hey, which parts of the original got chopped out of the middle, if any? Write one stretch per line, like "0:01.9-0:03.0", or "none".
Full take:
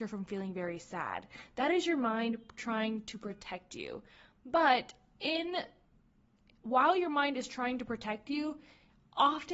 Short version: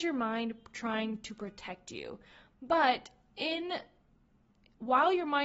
none